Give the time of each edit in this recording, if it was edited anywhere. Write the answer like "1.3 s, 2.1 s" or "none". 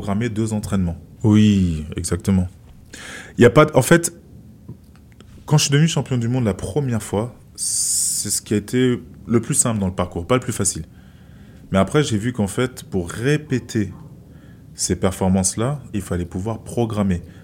1.2 s, 15.9 s